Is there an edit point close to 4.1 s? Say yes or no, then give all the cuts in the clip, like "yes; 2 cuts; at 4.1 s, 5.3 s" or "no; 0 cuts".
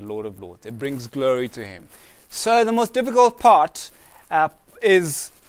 no; 0 cuts